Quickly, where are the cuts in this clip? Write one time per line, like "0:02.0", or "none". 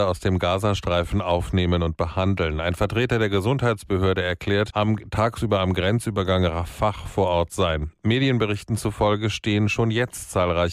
0:04.7